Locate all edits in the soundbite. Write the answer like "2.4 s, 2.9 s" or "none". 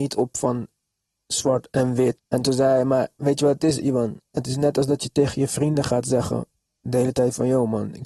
2.2 s